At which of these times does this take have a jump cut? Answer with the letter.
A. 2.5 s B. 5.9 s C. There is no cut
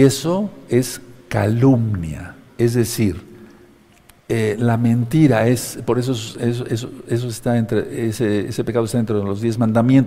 A